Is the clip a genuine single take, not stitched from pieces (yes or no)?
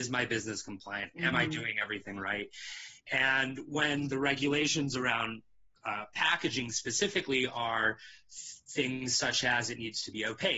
yes